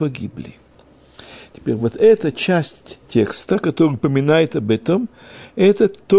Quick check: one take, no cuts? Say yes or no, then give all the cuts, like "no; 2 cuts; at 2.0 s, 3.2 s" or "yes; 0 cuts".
yes; 0 cuts